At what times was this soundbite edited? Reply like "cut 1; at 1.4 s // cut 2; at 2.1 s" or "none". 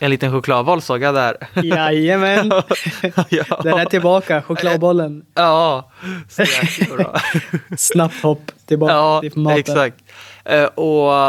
none